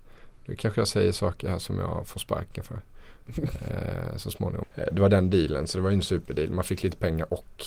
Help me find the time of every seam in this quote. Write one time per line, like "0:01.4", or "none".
0:04.6